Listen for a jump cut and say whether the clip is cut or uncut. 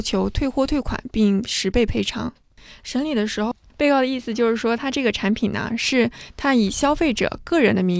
uncut